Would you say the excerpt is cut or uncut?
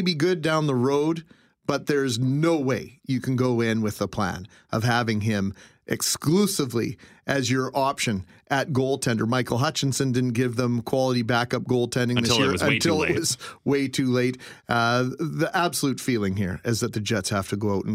uncut